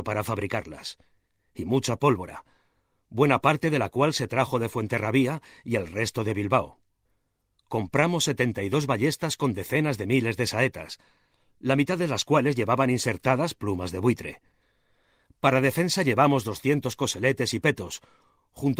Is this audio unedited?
yes; 0 cuts

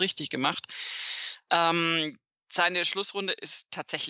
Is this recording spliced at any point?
no; 0 cuts

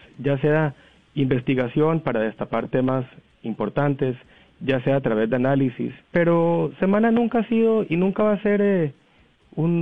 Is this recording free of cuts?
no; 1 cut; at 6.0 s

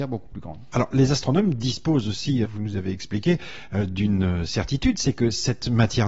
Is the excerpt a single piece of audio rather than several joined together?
no; 1 cut; at 2.4 s

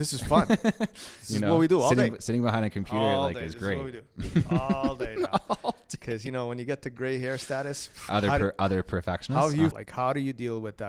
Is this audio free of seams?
no; 2 cuts; at 8.1 s, 9.7 s

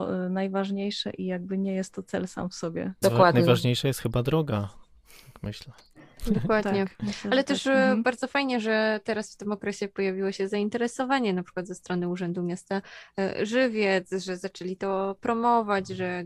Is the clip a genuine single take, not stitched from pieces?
no; 1 cut; at 3.0 s

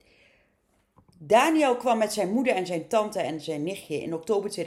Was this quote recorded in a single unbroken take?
yes; 0 cuts

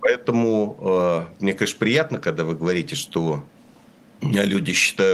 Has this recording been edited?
no; 0 cuts

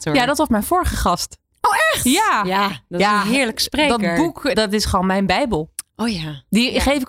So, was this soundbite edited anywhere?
yes; 1 cut; at 4.5 s

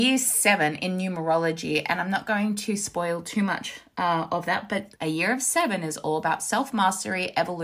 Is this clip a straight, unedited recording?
no; 1 cut; at 5.0 s

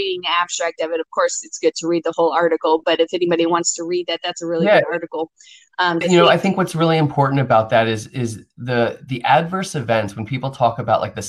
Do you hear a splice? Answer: yes; 1 cut; at 6.0 s

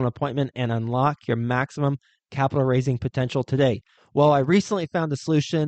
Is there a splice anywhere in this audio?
yes; 1 cut; at 4.0 s

